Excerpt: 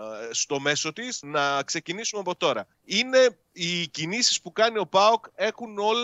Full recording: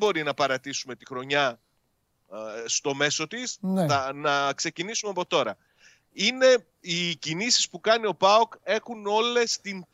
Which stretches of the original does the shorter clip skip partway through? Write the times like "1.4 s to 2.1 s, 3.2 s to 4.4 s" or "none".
3.6 s to 4.1 s, 5.6 s to 6.0 s